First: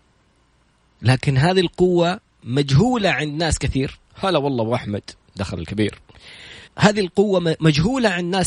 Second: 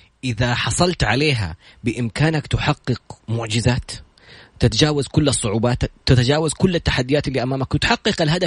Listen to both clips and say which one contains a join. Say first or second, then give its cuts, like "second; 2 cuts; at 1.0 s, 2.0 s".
first; 1 cut; at 6.7 s